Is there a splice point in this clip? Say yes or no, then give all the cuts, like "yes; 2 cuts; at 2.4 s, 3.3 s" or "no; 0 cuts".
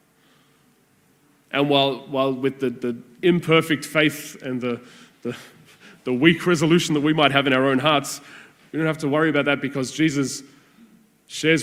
no; 0 cuts